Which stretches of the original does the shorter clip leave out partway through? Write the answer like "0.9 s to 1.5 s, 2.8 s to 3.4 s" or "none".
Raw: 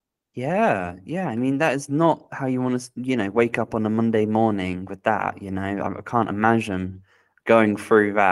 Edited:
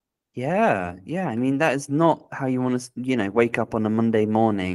none